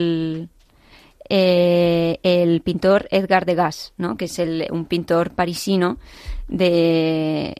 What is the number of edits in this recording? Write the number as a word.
one